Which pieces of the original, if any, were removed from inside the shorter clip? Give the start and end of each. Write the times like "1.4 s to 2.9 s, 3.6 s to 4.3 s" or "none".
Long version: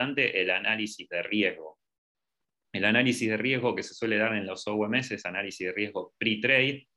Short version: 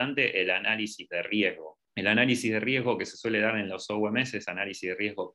1.8 s to 2.6 s